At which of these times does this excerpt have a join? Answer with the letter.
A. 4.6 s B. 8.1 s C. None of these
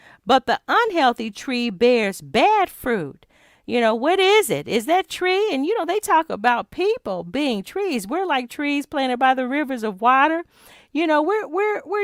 C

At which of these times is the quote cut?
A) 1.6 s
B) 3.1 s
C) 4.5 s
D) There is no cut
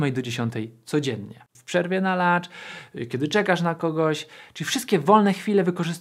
A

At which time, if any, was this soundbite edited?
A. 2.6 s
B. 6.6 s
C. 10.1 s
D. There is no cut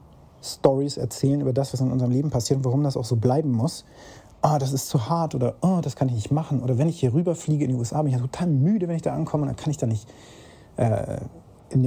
D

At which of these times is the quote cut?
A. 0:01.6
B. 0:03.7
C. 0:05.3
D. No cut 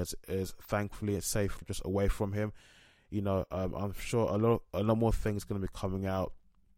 A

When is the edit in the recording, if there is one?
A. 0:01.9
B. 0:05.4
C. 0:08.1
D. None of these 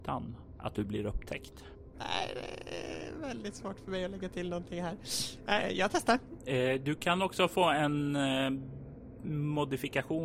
A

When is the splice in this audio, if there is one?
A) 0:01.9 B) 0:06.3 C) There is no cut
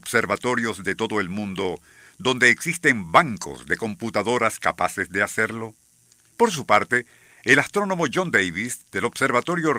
B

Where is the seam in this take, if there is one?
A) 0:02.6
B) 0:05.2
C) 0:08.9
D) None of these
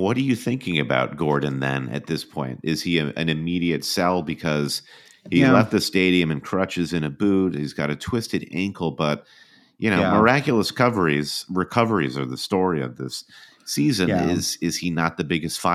D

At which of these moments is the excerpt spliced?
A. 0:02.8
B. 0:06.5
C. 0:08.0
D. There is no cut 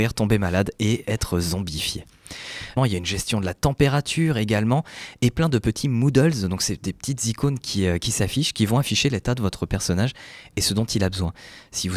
A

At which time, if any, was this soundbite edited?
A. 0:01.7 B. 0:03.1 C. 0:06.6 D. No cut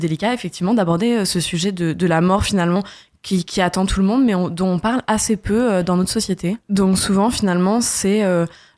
C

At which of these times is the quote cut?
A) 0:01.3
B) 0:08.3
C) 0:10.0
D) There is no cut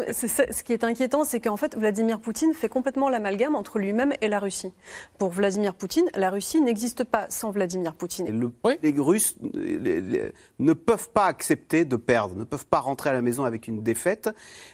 B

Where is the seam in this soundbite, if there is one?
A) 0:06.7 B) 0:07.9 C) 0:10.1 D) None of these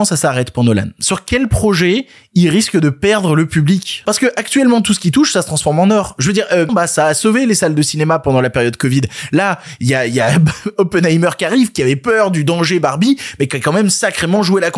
A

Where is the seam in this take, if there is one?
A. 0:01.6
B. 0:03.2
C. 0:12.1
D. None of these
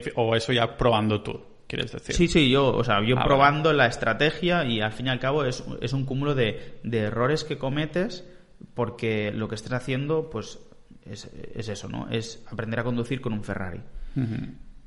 D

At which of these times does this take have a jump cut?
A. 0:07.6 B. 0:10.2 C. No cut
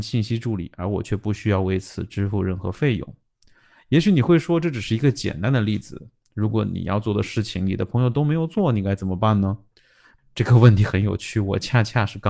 B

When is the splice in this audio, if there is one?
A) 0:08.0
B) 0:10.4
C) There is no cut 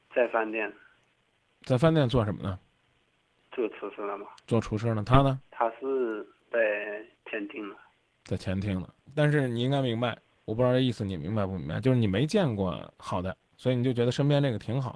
B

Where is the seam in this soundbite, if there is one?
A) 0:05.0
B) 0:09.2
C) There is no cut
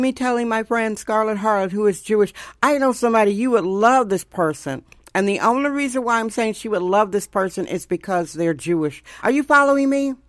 C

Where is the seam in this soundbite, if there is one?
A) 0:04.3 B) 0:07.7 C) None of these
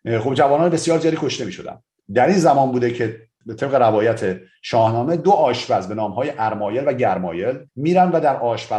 B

